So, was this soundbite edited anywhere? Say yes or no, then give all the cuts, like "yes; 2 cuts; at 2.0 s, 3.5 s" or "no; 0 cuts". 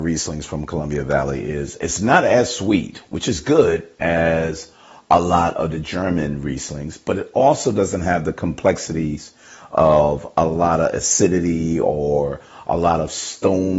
no; 0 cuts